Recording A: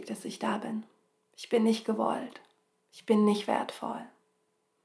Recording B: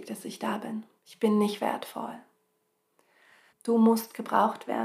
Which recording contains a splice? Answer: B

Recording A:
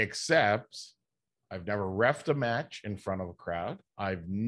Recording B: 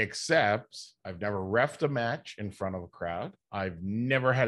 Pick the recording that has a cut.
B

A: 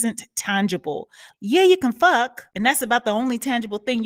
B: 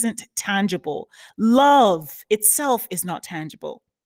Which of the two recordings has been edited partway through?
A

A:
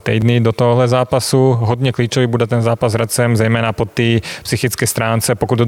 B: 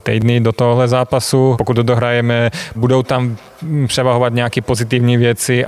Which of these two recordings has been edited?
B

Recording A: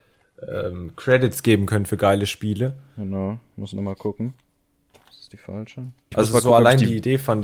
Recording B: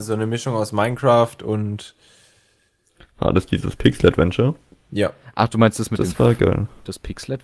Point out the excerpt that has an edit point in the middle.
A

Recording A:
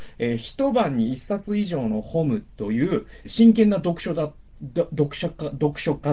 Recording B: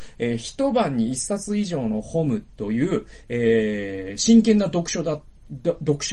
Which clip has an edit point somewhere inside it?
A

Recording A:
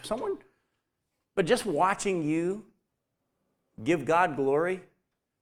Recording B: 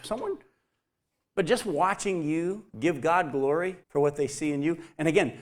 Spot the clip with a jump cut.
B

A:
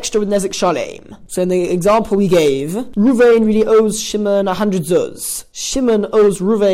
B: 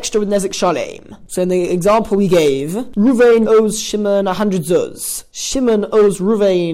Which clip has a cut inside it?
B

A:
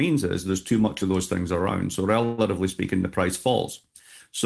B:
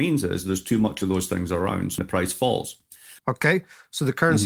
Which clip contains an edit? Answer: B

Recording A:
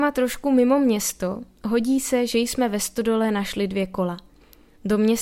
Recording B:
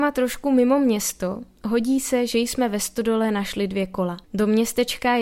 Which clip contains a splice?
B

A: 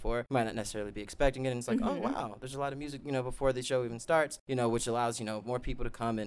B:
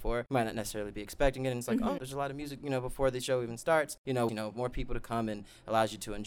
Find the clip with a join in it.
B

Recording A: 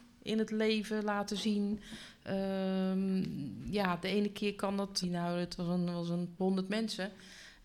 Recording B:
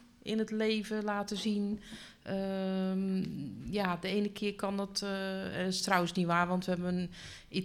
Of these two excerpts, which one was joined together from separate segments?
A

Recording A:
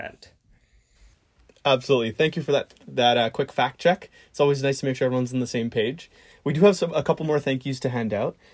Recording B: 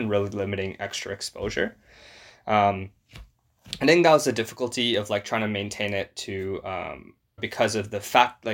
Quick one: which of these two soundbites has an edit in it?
B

